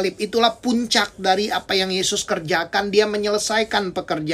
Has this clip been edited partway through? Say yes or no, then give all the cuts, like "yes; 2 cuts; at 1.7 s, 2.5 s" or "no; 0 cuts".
no; 0 cuts